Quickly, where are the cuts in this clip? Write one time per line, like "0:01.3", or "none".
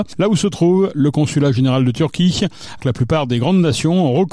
0:02.8